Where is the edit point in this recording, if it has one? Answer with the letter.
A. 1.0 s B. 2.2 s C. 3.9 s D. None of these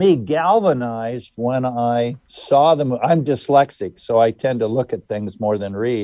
B